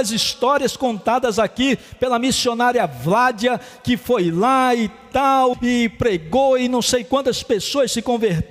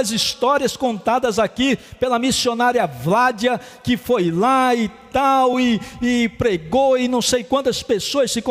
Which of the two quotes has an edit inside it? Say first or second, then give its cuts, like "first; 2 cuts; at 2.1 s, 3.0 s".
first; 1 cut; at 5.5 s